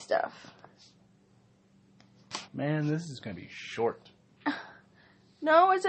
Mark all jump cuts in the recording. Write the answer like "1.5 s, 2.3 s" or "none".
2.5 s